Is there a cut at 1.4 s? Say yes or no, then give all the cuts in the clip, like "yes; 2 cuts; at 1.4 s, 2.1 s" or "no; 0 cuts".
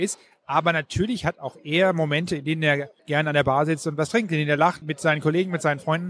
no; 2 cuts; at 3.0 s, 4.8 s